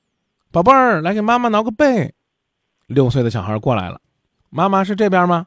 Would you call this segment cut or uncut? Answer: uncut